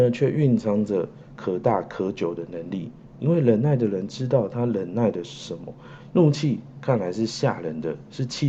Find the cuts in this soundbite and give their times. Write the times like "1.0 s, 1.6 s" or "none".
6.1 s